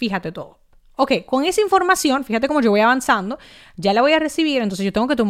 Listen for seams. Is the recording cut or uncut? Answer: uncut